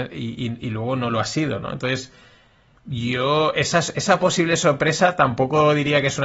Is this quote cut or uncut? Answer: uncut